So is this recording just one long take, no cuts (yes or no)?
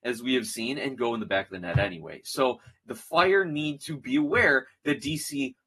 yes